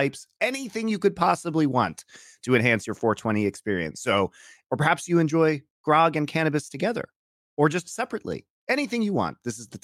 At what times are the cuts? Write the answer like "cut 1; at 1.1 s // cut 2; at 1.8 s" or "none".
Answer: cut 1; at 4.6 s

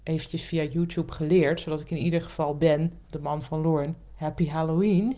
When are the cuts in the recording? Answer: cut 1; at 4.1 s

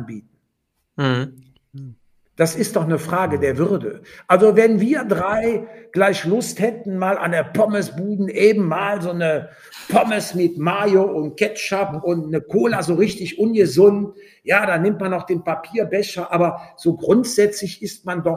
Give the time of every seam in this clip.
none

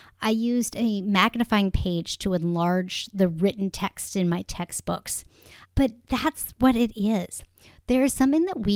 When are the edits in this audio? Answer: cut 1; at 5.6 s

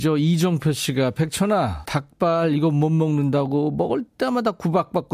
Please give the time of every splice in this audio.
cut 1; at 1.8 s

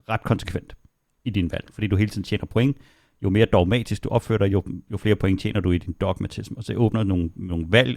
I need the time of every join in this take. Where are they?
none

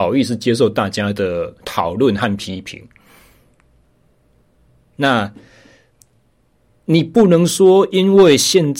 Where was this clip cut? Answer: cut 1; at 4.9 s

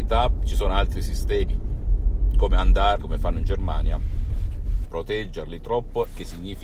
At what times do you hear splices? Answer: cut 1; at 3.0 s // cut 2; at 4.8 s

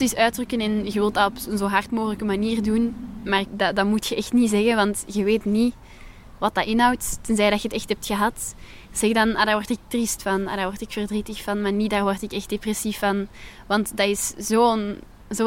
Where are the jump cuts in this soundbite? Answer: none

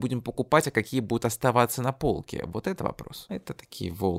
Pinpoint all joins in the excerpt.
cut 1; at 3.3 s

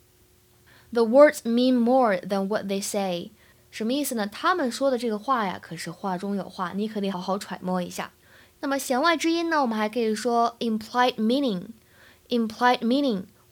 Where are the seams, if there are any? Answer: cut 1; at 7.1 s

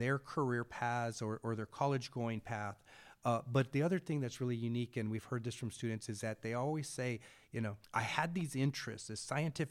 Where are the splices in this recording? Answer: cut 1; at 7.8 s

